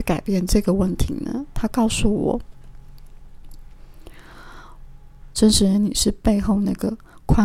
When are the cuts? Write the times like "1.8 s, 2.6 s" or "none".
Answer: 5.3 s

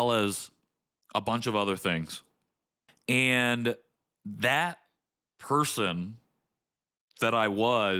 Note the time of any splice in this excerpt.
none

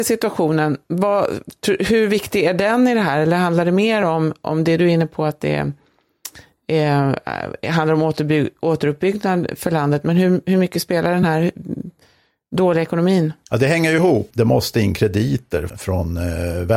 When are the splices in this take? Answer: 14.3 s, 15.7 s

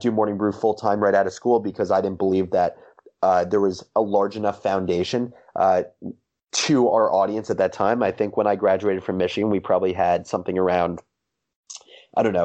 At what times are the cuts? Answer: none

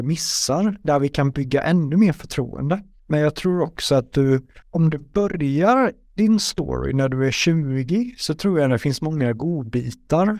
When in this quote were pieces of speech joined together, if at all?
3.0 s, 4.6 s

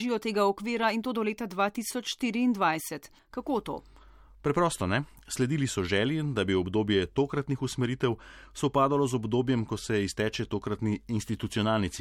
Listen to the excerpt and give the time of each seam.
3.2 s

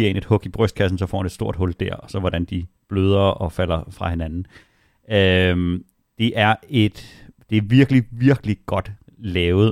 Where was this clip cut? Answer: none

